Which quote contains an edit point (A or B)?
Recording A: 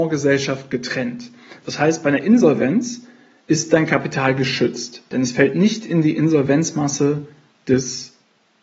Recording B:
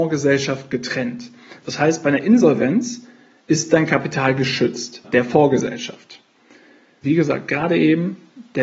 B